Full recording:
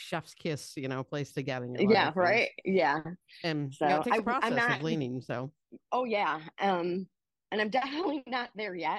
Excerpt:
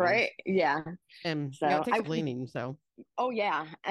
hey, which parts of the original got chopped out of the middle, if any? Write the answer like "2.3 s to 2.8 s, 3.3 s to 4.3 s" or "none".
4.2 s to 4.8 s

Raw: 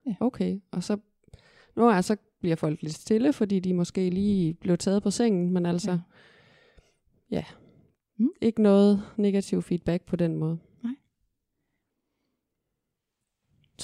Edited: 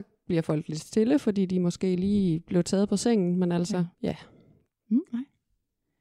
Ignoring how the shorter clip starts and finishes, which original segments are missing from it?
6.1 s to 7.2 s, 8.4 s to 10.8 s

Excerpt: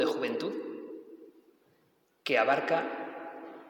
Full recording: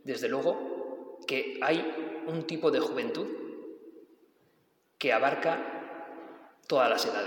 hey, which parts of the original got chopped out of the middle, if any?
none

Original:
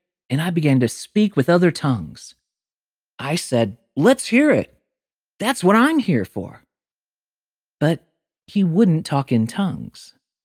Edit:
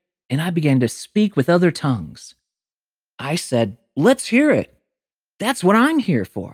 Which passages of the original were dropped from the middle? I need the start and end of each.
none

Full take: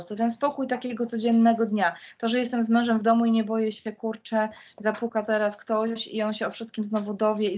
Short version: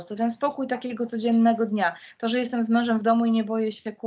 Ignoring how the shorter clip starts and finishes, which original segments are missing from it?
none

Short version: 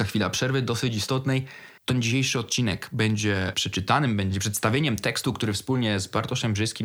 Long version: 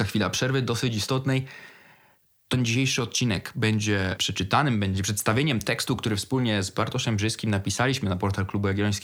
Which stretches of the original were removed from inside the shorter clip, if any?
1.8 s to 2.4 s

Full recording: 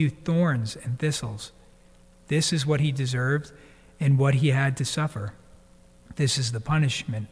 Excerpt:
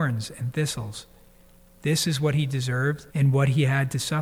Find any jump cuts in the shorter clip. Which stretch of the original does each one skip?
3.5 s to 3.9 s

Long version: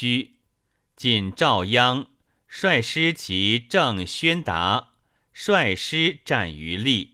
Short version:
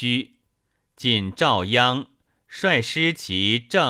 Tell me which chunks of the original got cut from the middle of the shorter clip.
none

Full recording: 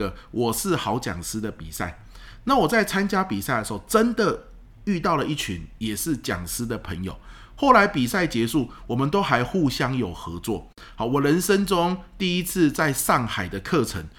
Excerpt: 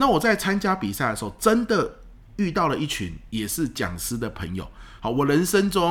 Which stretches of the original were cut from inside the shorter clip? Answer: 7.5 s to 10.9 s

